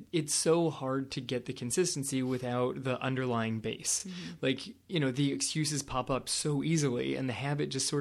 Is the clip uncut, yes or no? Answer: yes